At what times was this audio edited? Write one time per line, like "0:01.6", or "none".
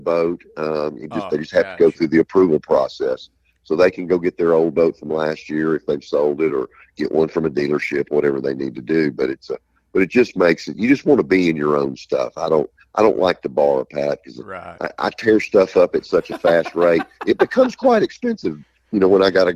none